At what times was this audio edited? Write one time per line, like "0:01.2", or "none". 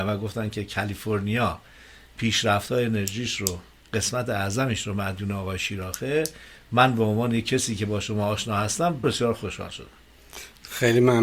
0:09.0